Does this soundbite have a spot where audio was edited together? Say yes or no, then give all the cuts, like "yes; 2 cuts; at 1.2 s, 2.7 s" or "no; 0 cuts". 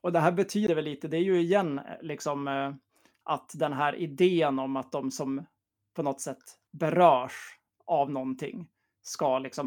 no; 0 cuts